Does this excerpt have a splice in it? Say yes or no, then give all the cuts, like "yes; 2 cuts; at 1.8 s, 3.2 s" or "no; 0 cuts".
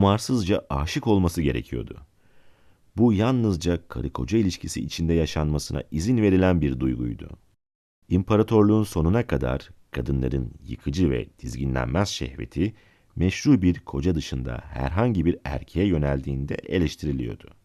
no; 0 cuts